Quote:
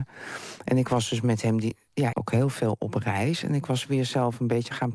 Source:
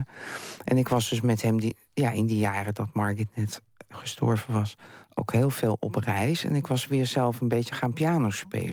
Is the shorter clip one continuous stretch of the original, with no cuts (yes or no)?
no